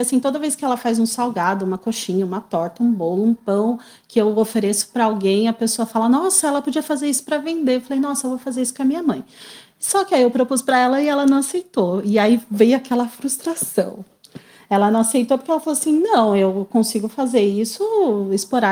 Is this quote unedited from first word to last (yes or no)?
yes